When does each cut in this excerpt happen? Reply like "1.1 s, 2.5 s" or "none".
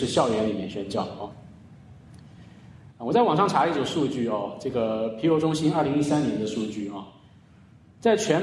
2.9 s

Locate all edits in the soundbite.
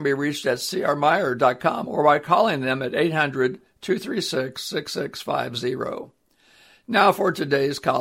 1.9 s

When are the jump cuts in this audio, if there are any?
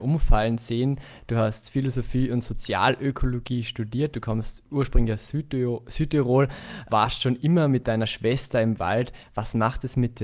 6.9 s

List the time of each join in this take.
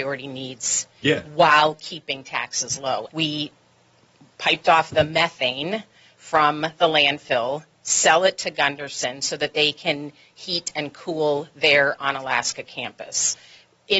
3.1 s

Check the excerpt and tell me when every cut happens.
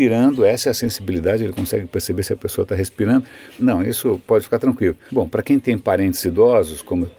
3.6 s, 5.1 s

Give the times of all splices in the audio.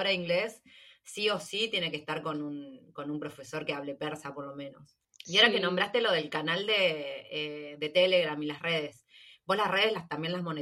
none

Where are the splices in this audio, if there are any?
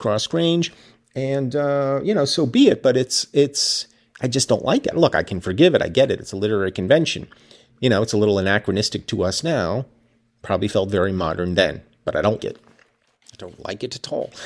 4.9 s, 12.4 s

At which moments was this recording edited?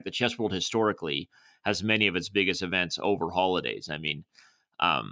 none

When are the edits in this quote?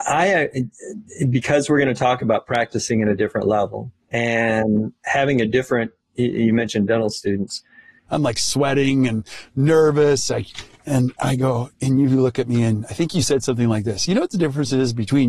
4.0 s, 8.1 s

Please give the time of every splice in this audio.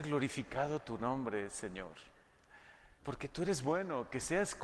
3.0 s

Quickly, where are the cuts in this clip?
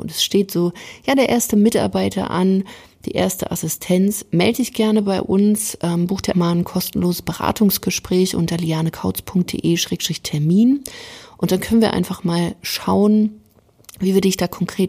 6.3 s

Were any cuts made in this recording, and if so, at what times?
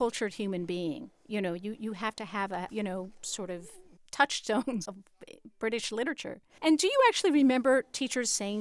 2.7 s, 4.9 s, 6.6 s

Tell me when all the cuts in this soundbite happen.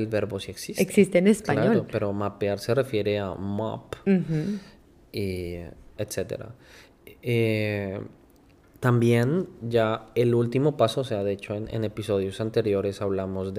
6.0 s

